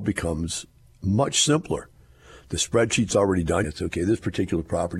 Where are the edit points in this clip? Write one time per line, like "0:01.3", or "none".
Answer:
0:03.6